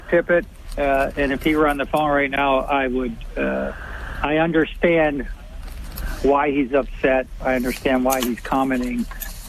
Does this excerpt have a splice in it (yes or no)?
no